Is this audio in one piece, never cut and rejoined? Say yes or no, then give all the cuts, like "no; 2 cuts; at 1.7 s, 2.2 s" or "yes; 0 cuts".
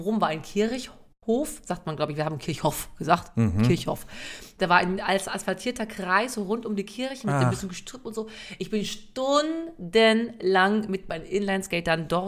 yes; 0 cuts